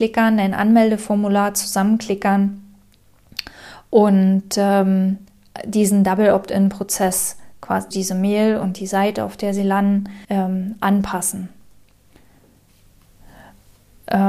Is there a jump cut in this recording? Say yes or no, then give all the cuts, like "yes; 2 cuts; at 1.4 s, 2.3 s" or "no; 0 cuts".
yes; 2 cuts; at 7.9 s, 10.2 s